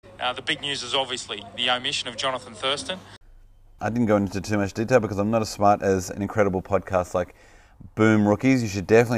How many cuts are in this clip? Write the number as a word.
one